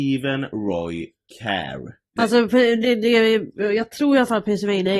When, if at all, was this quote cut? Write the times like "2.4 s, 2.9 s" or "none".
2.2 s